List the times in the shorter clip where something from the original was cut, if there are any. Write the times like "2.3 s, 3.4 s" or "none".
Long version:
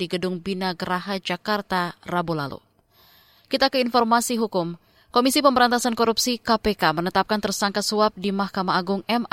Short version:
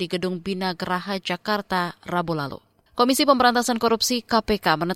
2.9 s